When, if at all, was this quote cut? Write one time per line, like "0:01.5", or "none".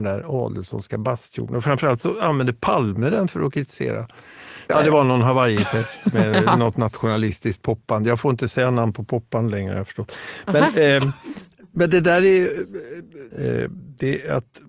0:04.7
0:13.3

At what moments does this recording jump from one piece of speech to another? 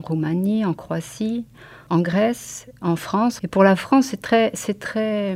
0:03.4

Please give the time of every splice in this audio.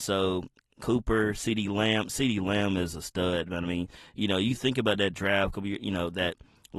none

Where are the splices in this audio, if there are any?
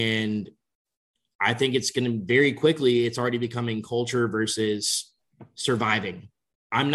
none

